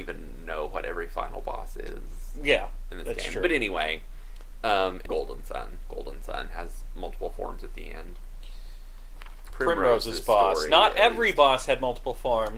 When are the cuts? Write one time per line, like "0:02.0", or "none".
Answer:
0:05.1
0:09.5